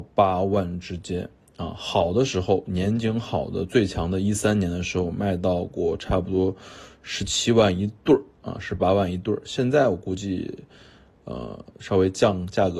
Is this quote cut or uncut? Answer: uncut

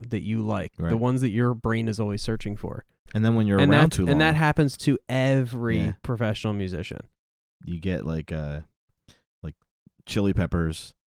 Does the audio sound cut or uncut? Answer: uncut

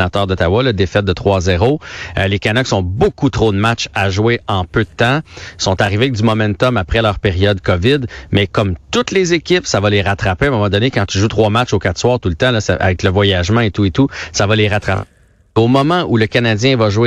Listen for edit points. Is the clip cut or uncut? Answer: uncut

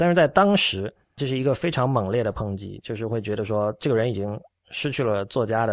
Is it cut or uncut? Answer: cut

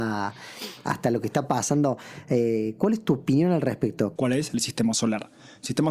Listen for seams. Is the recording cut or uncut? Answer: cut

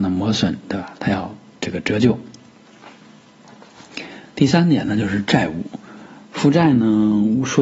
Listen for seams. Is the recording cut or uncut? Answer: uncut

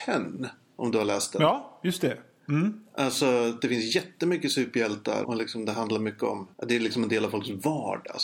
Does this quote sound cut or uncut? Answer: cut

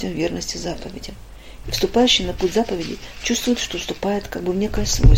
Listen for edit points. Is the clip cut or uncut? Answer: cut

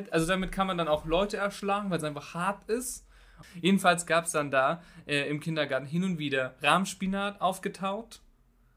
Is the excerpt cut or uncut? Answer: cut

